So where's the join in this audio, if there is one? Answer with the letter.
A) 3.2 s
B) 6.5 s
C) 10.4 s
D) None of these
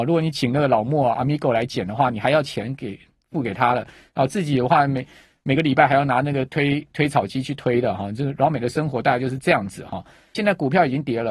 C